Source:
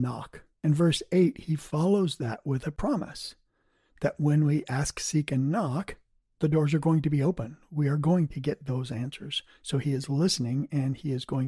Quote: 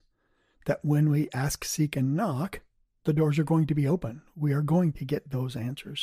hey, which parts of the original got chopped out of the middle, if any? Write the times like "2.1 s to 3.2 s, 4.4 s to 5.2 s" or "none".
none